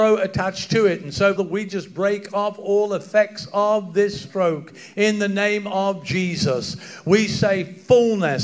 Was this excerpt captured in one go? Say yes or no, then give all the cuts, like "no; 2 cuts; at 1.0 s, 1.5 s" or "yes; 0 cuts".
no; 1 cut; at 1.4 s